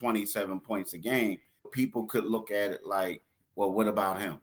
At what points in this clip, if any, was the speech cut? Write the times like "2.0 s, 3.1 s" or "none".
1.6 s